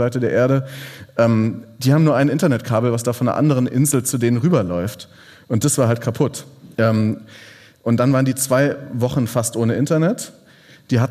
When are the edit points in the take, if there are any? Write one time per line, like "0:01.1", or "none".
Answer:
0:06.7

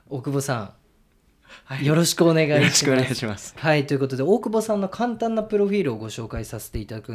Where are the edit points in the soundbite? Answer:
none

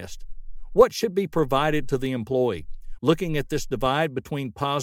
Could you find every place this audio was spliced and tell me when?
0:03.0

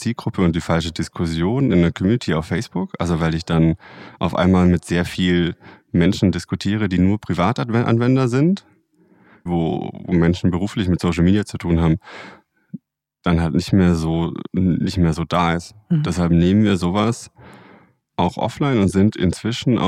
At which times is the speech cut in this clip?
0:09.5
0:18.1

